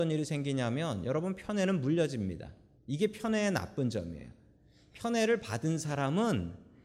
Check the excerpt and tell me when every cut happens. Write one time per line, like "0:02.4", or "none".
0:02.8